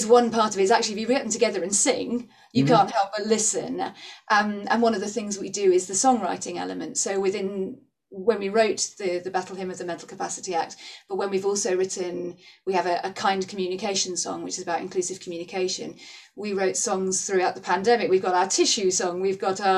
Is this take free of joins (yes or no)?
yes